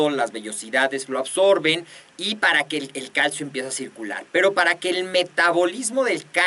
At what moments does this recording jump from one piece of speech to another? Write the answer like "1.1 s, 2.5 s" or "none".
none

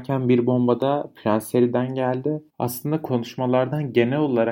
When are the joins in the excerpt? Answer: 2.5 s

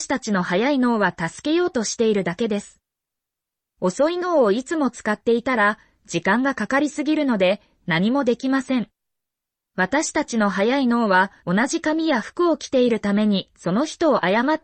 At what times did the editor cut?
9.5 s, 11.4 s

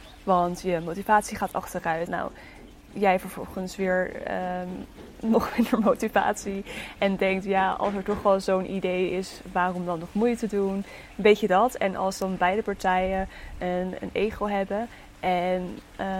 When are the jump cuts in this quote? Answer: 2.1 s

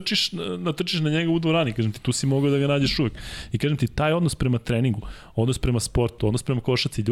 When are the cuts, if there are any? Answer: none

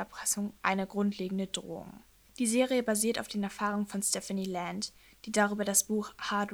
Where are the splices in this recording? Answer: 2.3 s

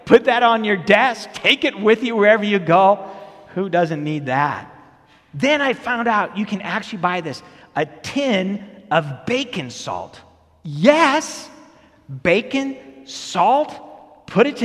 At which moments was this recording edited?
none

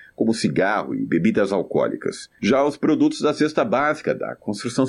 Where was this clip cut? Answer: none

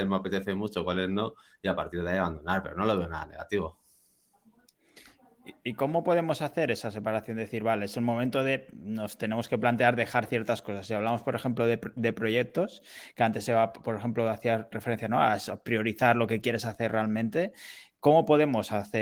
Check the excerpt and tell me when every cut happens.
none

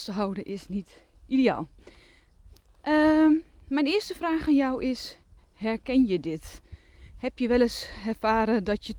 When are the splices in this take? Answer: none

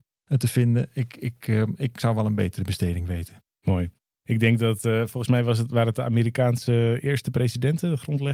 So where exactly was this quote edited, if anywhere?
none

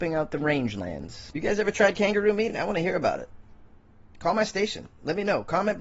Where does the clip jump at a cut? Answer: none

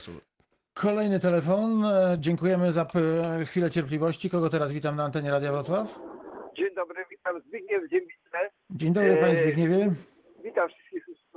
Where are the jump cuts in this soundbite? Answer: none

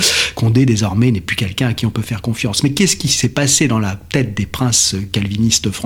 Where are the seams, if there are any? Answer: none

